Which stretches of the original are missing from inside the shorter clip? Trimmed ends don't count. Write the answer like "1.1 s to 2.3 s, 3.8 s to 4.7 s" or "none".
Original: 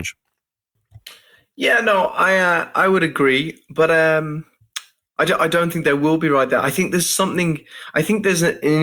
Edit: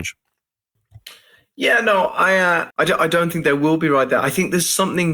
2.7 s to 5.1 s